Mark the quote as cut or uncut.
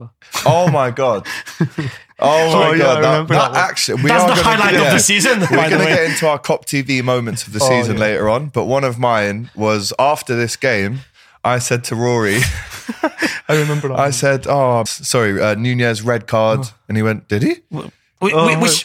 cut